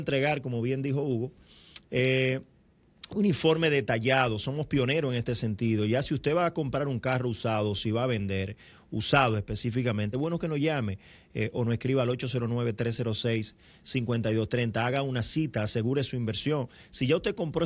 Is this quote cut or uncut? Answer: uncut